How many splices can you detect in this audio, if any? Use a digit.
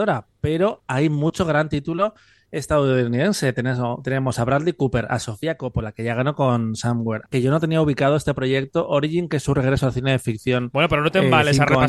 1